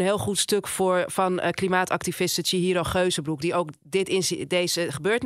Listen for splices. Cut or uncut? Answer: uncut